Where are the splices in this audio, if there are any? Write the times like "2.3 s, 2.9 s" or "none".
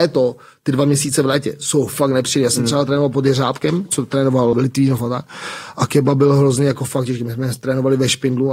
4.5 s